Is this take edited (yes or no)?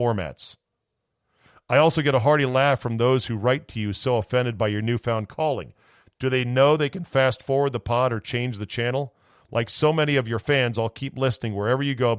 no